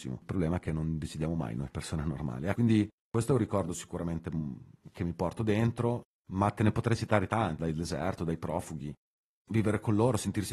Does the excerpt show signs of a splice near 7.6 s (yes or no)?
yes